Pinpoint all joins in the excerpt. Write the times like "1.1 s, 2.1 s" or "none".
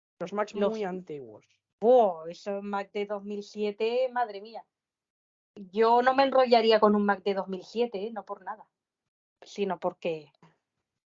none